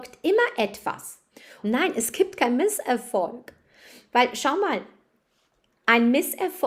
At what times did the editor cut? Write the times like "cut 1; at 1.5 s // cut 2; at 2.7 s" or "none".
cut 1; at 1.6 s